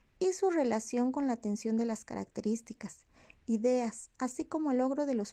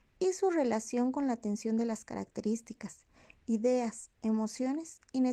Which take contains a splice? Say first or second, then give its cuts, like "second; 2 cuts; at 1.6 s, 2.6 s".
first; 1 cut; at 4.1 s